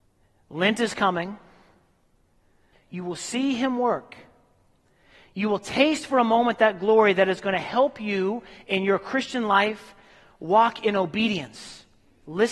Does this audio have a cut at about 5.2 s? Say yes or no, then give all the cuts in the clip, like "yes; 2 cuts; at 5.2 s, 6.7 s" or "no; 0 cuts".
no; 1 cut; at 2.7 s